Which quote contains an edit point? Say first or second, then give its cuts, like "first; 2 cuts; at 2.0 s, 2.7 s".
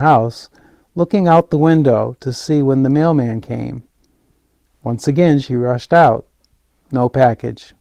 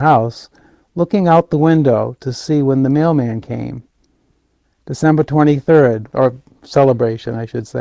second; 2 cuts; at 4.6 s, 6.1 s